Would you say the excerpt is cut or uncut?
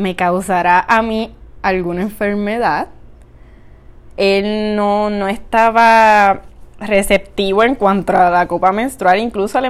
cut